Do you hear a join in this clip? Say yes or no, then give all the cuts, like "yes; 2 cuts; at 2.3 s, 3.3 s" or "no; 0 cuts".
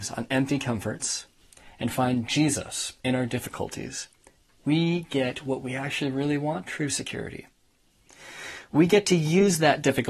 yes; 1 cut; at 6.6 s